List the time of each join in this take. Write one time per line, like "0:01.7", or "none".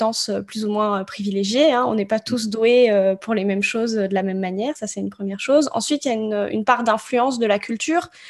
none